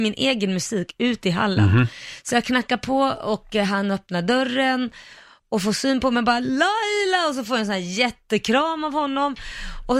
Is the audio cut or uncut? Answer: uncut